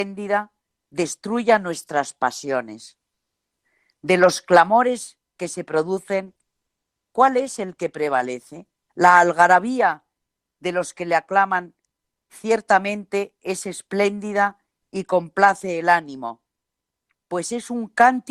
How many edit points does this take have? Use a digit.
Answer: 1